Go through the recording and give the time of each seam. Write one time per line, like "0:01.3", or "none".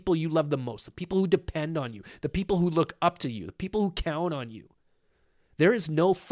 none